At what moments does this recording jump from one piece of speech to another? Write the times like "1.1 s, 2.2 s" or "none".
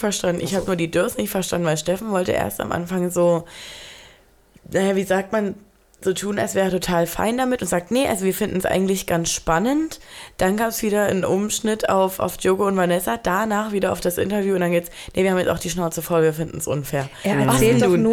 none